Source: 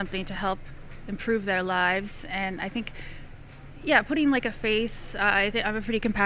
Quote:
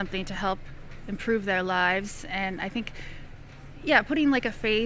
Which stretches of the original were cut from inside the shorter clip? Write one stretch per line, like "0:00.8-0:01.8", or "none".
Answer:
none